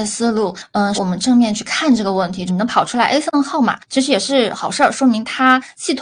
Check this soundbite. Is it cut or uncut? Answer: cut